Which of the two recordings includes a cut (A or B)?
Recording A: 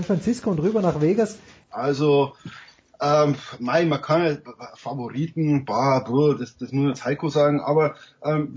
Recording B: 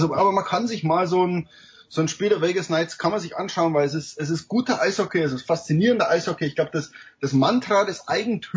A